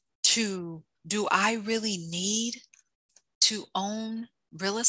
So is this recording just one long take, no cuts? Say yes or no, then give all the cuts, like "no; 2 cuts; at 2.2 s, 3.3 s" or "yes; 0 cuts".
no; 1 cut; at 1.0 s